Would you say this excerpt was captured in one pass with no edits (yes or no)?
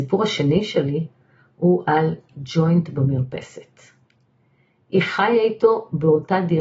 yes